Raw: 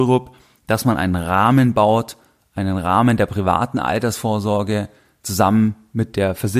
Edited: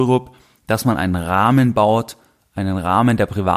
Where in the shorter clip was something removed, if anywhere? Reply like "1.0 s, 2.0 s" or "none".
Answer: none